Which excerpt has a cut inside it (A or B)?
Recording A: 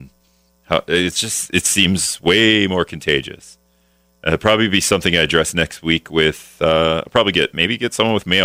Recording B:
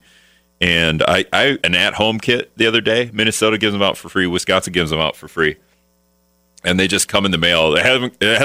B